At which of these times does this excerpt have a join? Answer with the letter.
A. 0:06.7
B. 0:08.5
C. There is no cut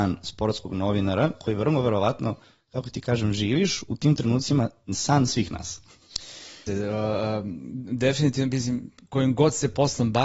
A